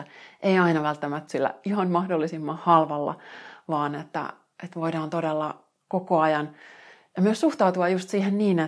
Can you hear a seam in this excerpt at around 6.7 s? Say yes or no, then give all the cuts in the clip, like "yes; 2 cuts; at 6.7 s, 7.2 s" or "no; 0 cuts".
no; 1 cut; at 1.3 s